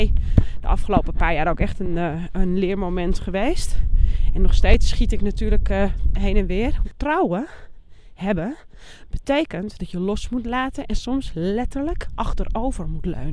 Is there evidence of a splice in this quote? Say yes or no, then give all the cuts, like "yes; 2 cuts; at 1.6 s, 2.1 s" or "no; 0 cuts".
yes; 1 cut; at 6.8 s